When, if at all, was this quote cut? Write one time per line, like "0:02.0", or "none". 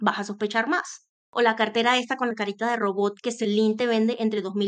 0:01.1